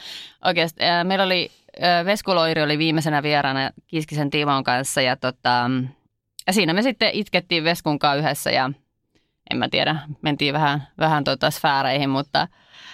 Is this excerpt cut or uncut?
uncut